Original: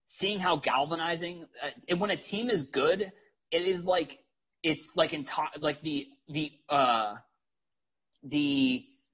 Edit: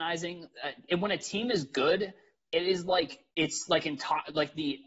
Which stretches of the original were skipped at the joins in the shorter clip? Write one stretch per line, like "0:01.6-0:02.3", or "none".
0:04.3-0:04.6